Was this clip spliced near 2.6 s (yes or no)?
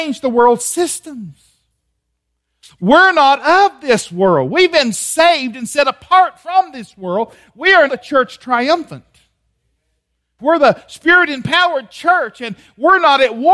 no